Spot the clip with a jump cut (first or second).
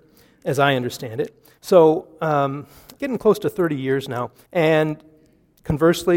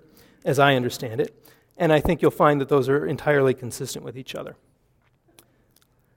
first